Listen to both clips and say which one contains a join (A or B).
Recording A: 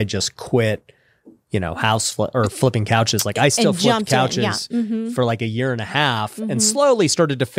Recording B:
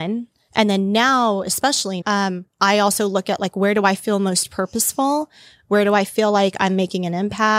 B